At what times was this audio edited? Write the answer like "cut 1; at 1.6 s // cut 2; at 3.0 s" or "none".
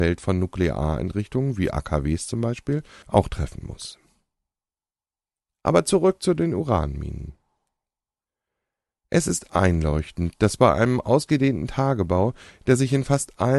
none